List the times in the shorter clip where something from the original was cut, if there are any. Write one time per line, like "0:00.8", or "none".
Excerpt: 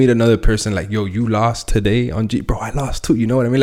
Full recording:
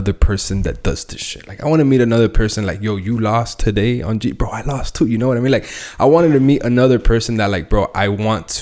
none